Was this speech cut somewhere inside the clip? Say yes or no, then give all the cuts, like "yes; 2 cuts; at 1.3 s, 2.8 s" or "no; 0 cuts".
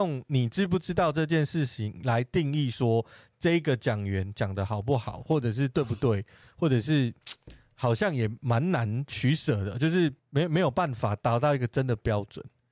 yes; 1 cut; at 10.2 s